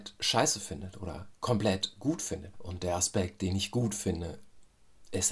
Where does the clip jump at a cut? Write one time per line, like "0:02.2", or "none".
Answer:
0:02.5